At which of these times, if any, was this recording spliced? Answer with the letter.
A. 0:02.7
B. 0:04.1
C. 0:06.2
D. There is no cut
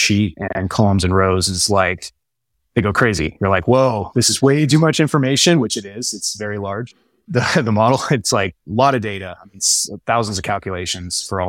D